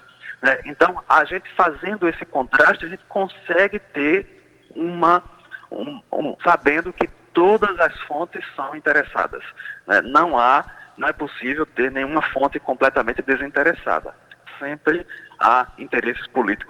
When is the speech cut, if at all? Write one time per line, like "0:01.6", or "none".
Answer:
0:06.4